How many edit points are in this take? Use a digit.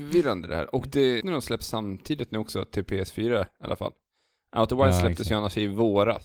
1